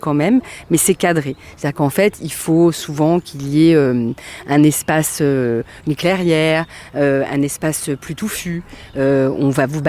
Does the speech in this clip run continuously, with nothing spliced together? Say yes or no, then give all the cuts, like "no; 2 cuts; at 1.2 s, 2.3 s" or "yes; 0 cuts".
yes; 0 cuts